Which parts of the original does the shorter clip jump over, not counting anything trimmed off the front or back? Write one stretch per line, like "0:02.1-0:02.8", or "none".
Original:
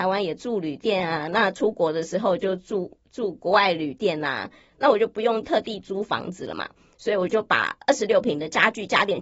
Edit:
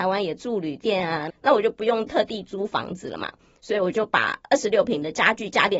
0:01.3-0:04.7